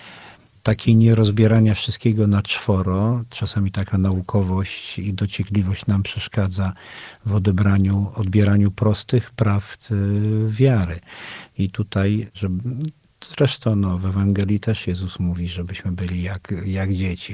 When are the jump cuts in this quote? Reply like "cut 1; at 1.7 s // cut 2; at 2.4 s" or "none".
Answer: cut 1; at 12.3 s

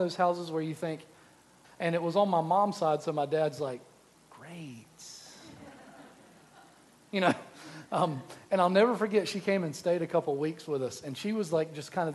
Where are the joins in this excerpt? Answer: cut 1; at 1.6 s

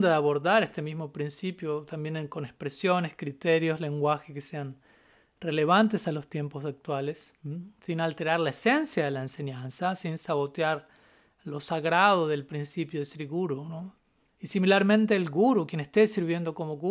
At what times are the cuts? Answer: cut 1; at 14.3 s

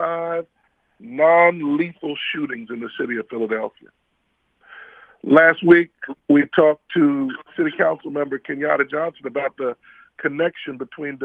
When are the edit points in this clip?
none

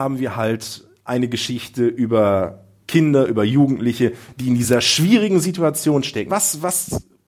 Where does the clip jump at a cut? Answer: cut 1; at 6.3 s

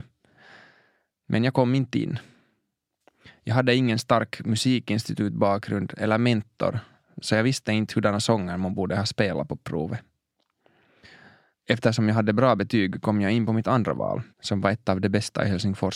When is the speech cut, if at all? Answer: cut 1; at 14.3 s

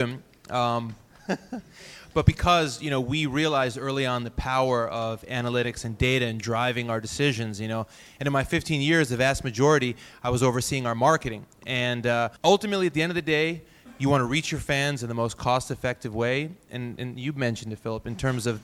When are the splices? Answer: cut 1; at 12.4 s

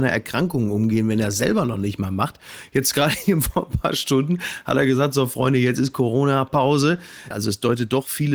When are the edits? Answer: cut 1; at 7.3 s

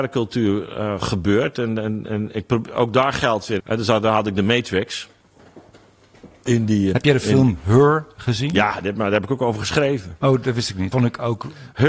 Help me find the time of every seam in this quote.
cut 1; at 3.6 s // cut 2; at 6.9 s // cut 3; at 10.9 s

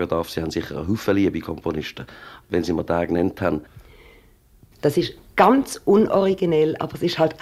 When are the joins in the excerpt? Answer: cut 1; at 2.4 s // cut 2; at 4.7 s

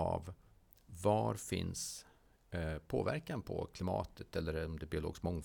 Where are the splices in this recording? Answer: none

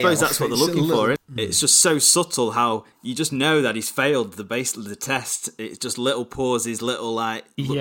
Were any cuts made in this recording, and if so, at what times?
cut 1; at 1.2 s // cut 2; at 2.9 s

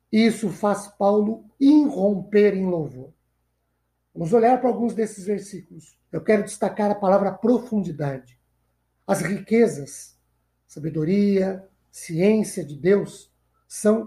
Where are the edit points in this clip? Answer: cut 1; at 6.0 s

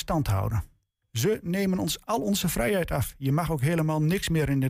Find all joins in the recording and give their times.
cut 1; at 1.0 s

